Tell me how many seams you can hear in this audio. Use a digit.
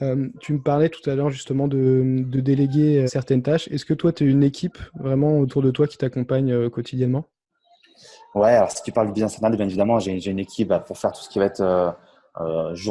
1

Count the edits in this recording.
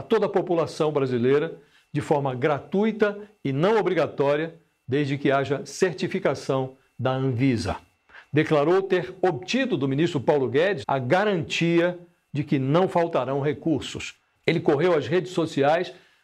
2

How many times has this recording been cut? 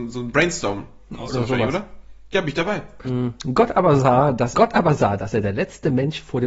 2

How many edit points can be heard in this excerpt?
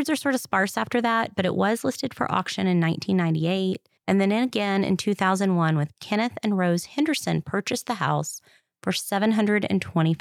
1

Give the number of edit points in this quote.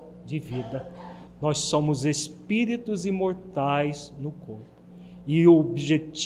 1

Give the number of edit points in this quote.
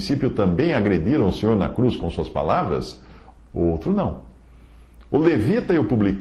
1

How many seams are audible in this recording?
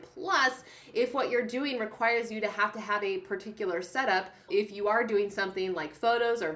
1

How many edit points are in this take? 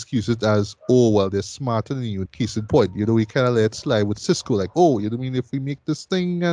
1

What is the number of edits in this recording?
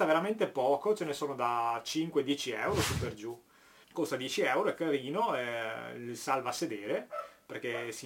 1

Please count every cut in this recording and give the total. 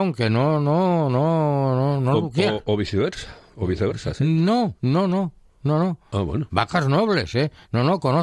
2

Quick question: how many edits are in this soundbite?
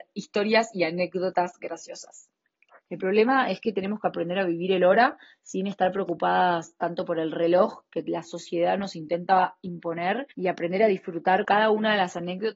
3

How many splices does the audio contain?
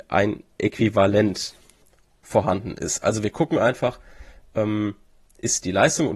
0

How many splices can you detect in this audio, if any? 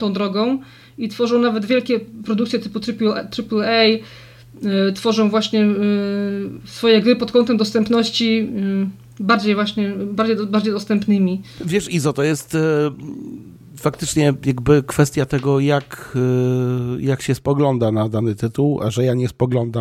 0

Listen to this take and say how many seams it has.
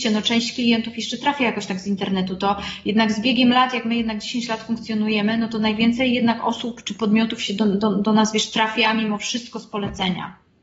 0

